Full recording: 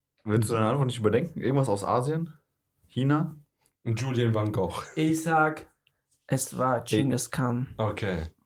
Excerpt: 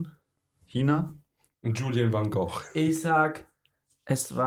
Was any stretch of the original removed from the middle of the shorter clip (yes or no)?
no